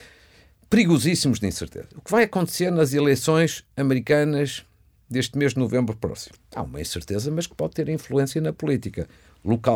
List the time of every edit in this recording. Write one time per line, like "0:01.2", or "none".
0:06.4